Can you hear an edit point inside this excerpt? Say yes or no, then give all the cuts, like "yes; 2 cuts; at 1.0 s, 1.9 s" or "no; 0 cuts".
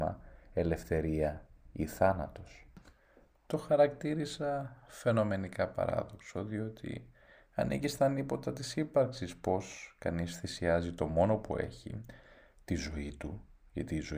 no; 0 cuts